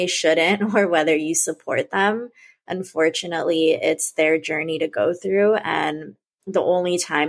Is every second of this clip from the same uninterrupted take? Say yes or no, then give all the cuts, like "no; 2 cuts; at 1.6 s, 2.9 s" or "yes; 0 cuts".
yes; 0 cuts